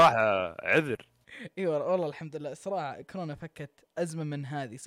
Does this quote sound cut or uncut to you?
cut